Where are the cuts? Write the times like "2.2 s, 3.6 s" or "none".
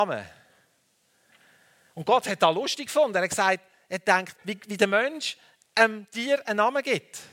4.4 s